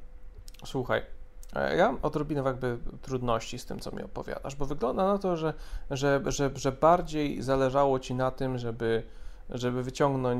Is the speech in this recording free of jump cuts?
yes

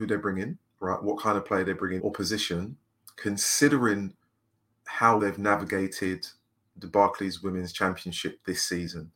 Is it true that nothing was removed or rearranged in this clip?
no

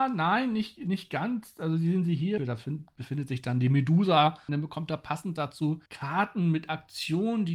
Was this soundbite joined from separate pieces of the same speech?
yes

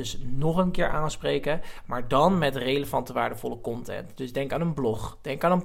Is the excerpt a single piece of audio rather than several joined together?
yes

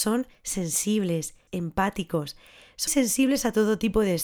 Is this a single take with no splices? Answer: no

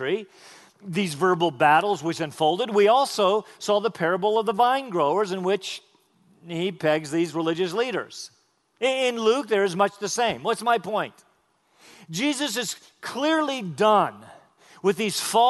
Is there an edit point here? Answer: no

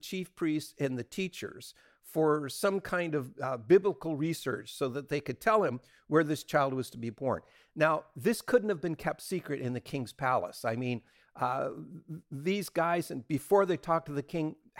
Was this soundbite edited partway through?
no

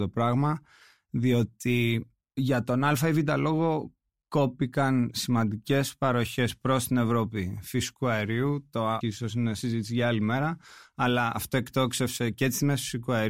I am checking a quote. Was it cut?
yes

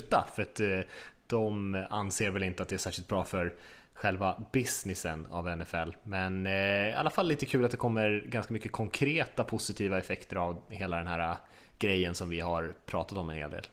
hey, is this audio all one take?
yes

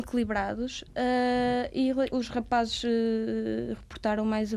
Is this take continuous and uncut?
no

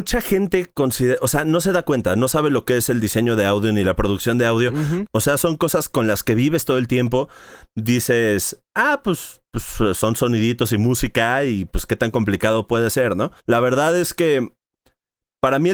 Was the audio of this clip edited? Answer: yes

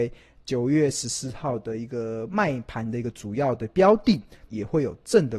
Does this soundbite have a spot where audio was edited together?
yes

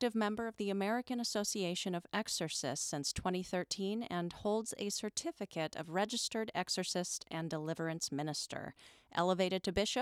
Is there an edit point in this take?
no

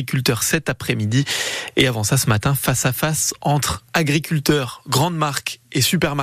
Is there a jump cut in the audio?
no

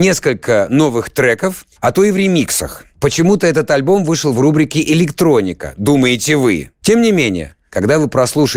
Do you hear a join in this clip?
yes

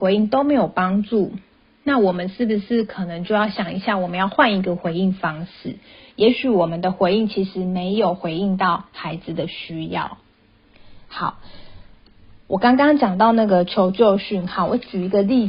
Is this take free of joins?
yes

